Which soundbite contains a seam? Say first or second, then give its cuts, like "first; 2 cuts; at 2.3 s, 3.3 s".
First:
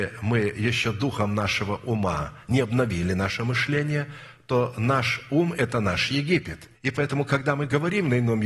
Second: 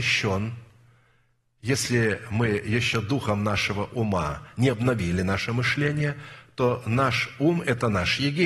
first; 1 cut; at 6.7 s